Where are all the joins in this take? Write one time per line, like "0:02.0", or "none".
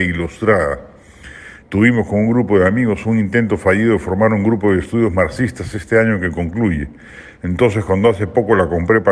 0:01.6
0:07.4